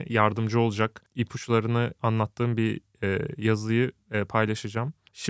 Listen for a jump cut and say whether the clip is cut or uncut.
uncut